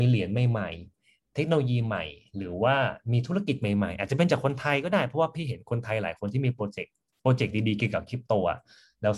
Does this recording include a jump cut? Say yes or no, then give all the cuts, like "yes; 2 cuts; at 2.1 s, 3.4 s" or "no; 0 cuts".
no; 0 cuts